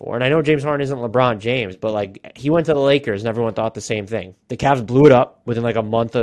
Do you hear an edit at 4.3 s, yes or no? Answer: yes